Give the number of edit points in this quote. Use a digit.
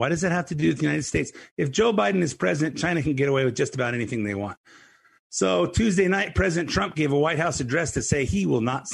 0